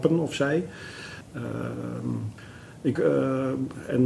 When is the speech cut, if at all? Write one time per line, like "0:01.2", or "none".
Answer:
0:01.2
0:03.0